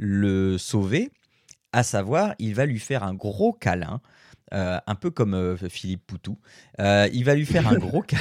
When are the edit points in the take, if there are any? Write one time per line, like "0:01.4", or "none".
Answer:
none